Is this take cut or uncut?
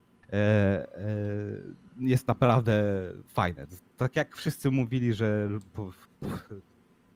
uncut